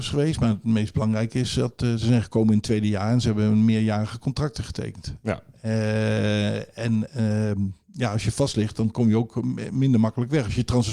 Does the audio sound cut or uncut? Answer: uncut